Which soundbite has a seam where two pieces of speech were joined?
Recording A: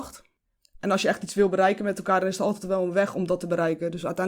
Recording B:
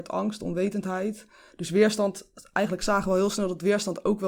B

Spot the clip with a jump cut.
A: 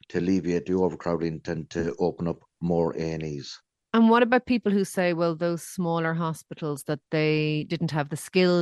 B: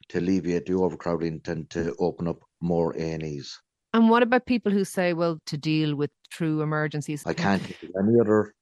B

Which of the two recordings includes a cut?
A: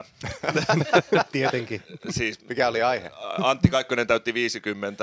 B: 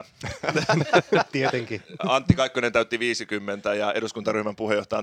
B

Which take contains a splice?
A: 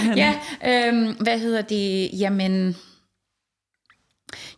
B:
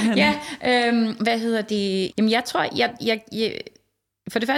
B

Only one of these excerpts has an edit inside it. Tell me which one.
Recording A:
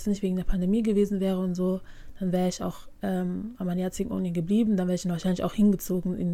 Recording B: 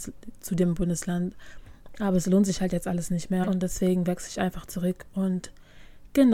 B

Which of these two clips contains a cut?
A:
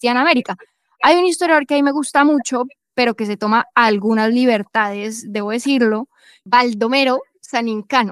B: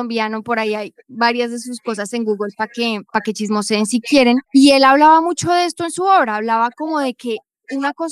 B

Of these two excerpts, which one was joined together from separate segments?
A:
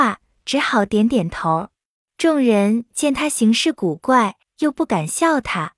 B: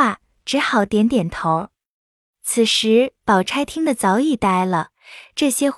A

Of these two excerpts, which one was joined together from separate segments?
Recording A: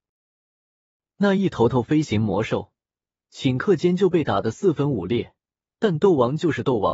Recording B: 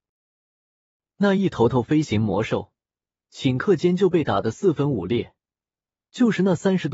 A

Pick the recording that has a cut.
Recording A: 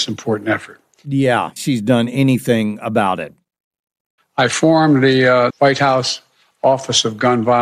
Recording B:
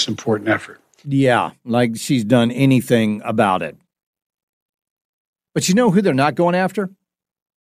A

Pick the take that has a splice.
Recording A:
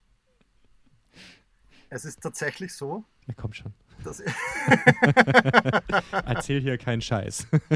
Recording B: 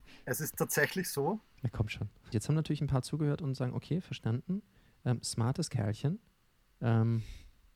B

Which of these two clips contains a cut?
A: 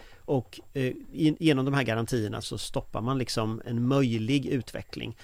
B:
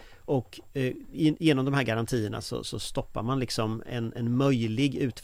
A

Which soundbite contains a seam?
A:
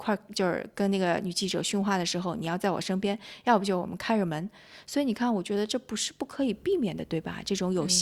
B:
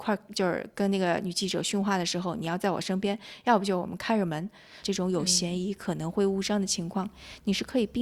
B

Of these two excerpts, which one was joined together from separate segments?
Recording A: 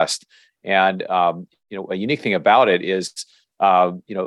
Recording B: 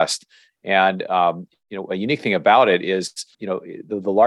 B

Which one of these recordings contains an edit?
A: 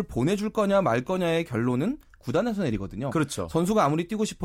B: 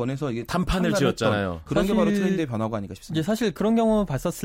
B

